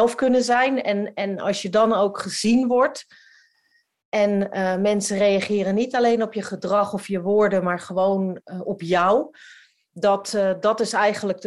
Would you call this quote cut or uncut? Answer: uncut